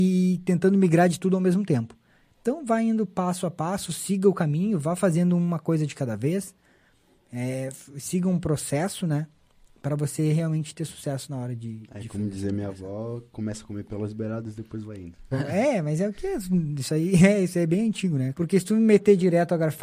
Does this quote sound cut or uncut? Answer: cut